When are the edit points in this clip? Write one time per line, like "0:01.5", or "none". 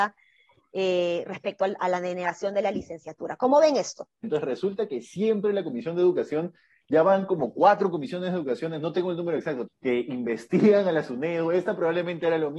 0:04.2
0:09.7